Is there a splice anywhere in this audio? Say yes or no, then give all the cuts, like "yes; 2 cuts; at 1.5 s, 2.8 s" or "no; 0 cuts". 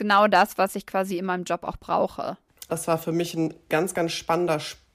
yes; 1 cut; at 2.7 s